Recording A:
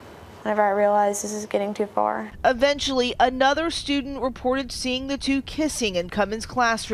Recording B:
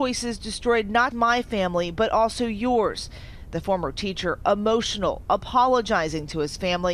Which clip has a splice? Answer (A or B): B